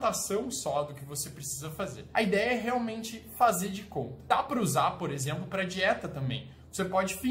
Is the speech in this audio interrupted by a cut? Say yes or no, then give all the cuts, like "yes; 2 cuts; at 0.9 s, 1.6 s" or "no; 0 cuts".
no; 0 cuts